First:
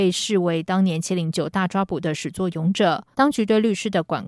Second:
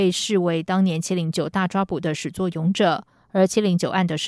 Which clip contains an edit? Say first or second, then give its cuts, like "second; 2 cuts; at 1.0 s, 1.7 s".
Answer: first; 1 cut; at 3.1 s